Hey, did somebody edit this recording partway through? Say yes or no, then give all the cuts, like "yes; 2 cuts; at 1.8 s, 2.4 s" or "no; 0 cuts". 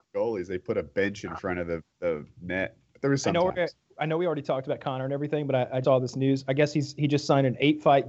yes; 1 cut; at 5.8 s